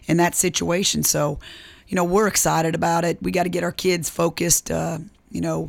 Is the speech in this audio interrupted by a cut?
no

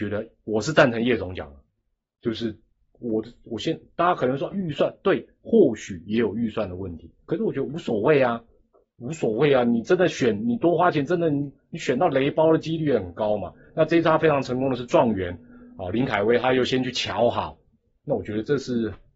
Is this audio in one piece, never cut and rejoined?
yes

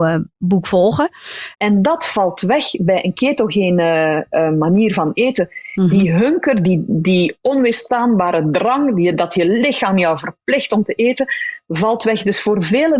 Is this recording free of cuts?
no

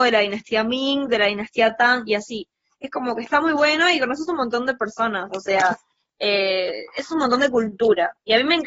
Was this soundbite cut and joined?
no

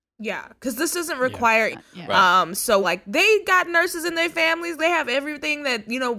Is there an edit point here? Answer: yes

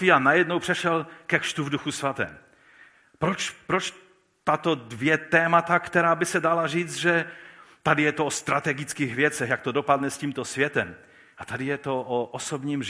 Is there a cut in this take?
no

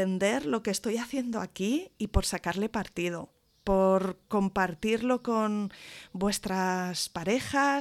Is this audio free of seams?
yes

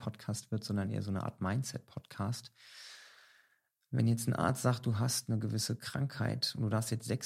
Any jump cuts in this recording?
no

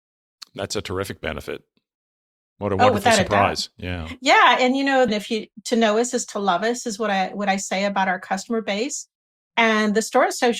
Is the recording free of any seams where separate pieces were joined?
no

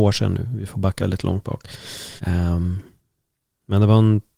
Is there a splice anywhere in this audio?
yes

